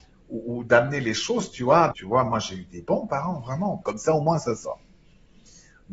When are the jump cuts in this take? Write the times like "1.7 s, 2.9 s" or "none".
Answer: 1.9 s, 3.8 s

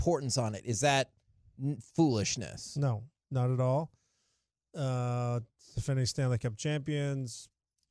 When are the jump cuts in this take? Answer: none

